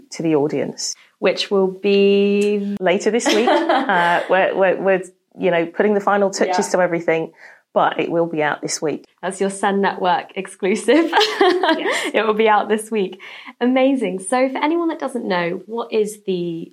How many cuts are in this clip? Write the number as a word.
zero